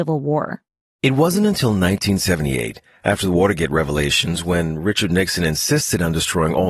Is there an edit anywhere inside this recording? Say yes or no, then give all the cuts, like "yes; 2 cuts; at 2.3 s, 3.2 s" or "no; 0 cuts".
no; 0 cuts